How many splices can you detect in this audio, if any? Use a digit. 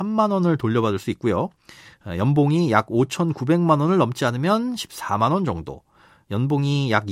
0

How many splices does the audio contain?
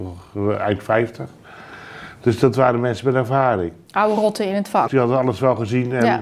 1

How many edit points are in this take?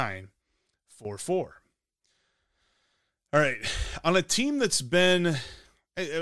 0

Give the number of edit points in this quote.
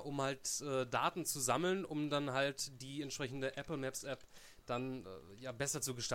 0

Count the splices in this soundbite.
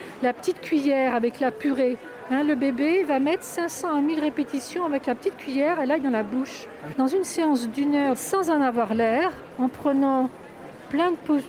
2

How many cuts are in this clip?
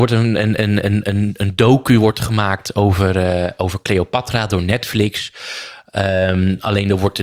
0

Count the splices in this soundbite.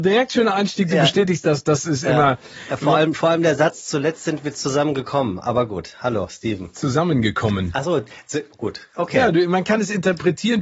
0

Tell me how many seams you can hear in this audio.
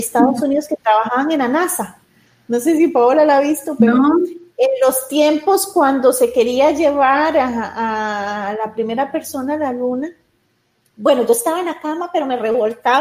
0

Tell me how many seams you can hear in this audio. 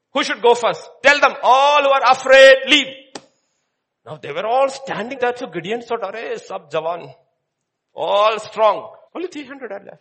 2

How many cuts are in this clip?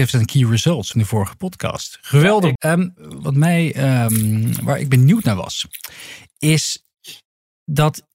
2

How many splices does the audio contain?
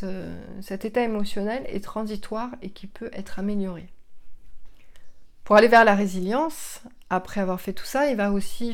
0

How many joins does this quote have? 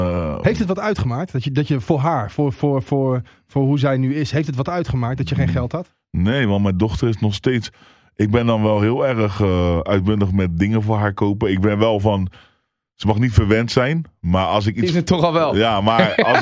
0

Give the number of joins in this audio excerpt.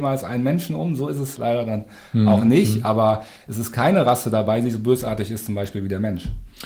1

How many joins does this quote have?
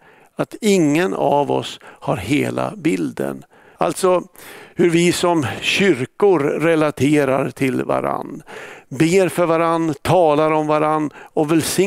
1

